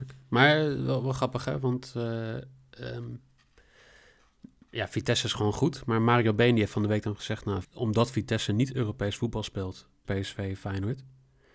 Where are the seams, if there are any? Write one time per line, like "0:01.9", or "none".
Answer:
0:07.6
0:10.0